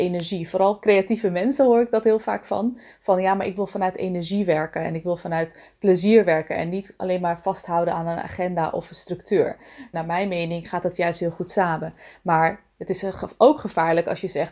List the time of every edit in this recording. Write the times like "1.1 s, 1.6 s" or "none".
9.9 s

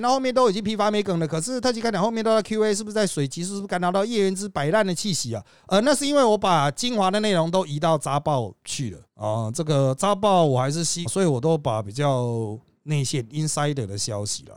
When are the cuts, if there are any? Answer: 9.1 s, 11.1 s

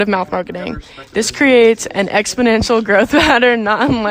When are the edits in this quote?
none

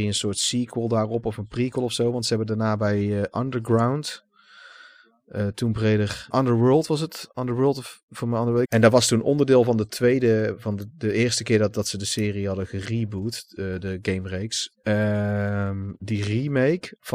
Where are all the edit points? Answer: 6.3 s, 8.6 s, 14.7 s

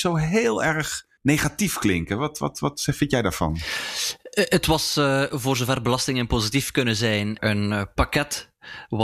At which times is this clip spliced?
1.2 s, 7.4 s

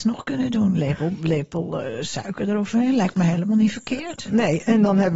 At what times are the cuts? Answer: none

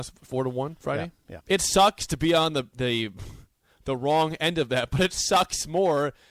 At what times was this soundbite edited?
1.4 s

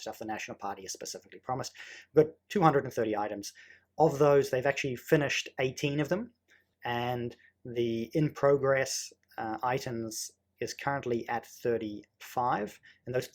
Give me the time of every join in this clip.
6.7 s

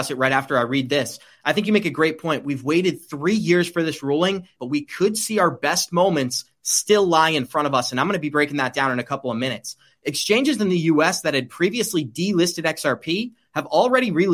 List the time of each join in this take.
4.6 s

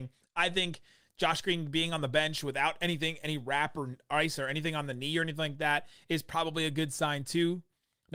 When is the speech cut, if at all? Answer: none

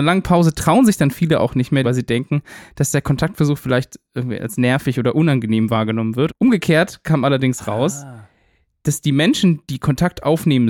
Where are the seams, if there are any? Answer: 1.8 s, 6.3 s

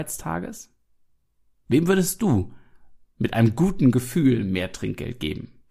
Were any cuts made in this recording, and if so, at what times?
none

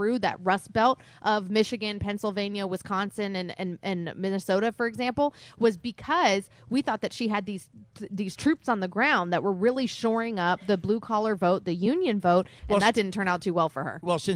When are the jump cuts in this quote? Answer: 12.6 s

